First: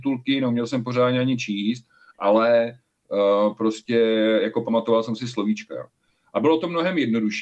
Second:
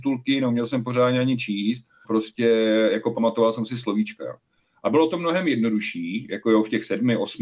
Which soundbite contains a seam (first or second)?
second